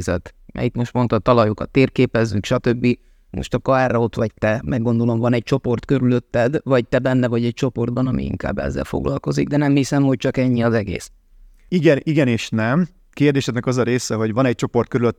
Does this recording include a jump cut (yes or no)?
no